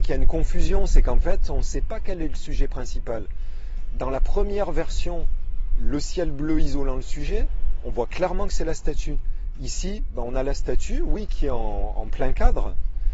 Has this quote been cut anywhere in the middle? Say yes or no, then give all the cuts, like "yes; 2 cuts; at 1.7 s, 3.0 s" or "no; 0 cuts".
no; 0 cuts